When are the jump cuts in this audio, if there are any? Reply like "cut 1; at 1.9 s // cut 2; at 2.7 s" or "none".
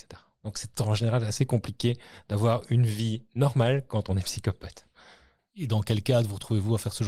cut 1; at 5.4 s